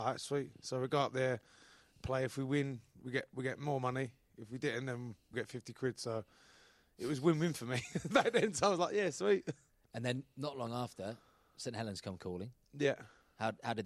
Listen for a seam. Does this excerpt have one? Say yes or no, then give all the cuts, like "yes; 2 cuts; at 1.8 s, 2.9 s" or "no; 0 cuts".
yes; 1 cut; at 5.3 s